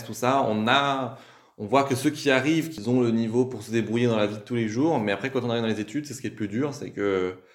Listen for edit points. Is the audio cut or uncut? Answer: uncut